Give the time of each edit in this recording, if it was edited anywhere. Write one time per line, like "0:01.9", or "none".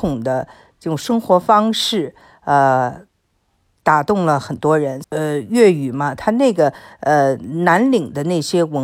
0:05.0